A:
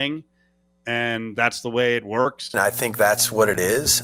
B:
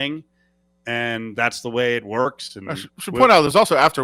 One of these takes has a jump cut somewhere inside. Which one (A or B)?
A